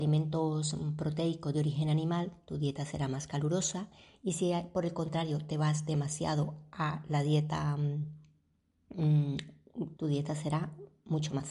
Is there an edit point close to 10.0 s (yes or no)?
yes